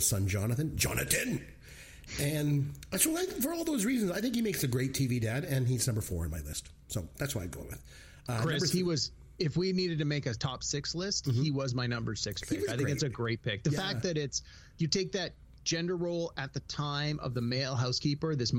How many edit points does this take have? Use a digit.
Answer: 0